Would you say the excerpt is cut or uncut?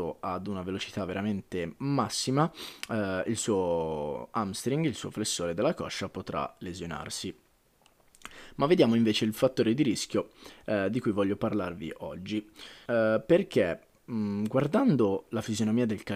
cut